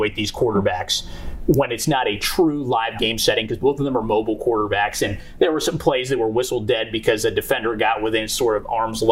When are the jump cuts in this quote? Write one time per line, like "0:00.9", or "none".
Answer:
none